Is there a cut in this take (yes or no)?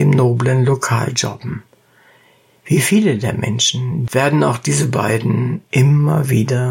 yes